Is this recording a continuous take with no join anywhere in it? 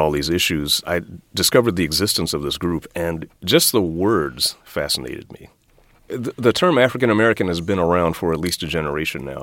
yes; 0 cuts

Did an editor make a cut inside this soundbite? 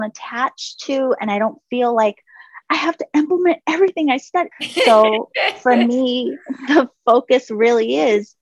yes; 1 cut; at 4.5 s

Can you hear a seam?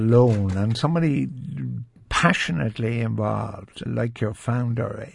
yes; 1 cut; at 3.9 s

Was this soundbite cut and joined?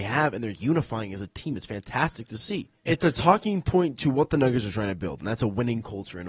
yes; 1 cut; at 2.9 s

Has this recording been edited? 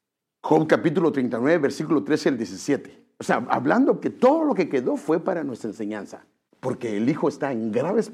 yes; 2 cuts; at 4.0 s, 6.5 s

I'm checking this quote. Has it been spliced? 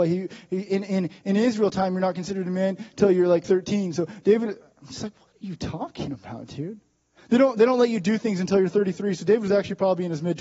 no; 0 cuts

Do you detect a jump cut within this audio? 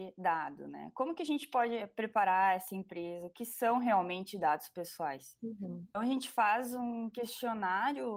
no; 0 cuts

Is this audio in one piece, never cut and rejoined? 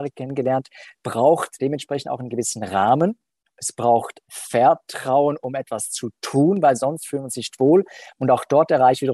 no; 1 cut; at 8.1 s

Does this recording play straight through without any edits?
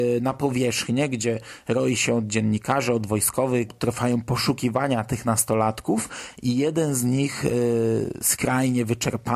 no; 1 cut; at 3.7 s

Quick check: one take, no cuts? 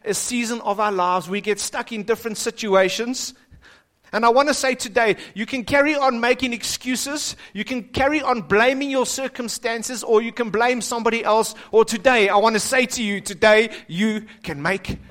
yes; 0 cuts

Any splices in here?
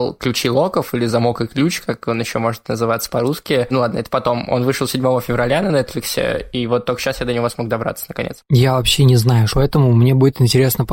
yes; 2 cuts; at 3.7 s, 9.5 s

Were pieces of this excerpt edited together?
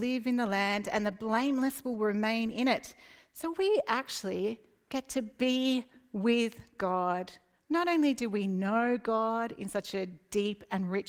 no; 0 cuts

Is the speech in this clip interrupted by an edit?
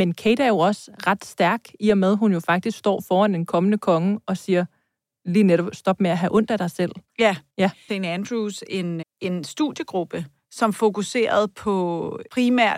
yes; 2 cuts; at 7.9 s, 9.0 s

